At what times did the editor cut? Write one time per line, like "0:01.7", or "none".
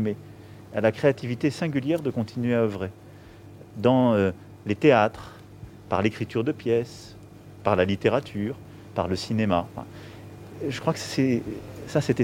none